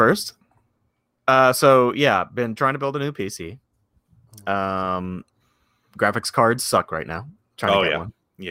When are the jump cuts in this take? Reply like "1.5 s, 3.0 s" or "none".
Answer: none